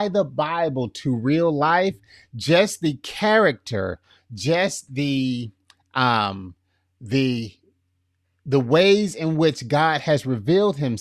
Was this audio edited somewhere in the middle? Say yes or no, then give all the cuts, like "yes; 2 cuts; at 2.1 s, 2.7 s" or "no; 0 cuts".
no; 0 cuts